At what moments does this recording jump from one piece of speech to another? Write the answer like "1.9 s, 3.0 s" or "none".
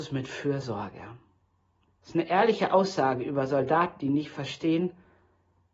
1.9 s